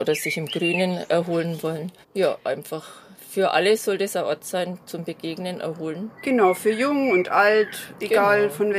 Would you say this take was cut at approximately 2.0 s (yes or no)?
yes